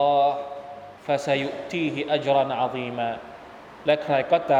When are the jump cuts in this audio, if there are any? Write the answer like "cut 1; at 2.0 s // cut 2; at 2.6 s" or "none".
cut 1; at 1.0 s